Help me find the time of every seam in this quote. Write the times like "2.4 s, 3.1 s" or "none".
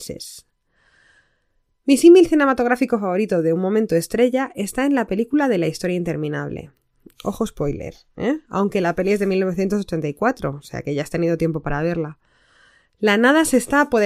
none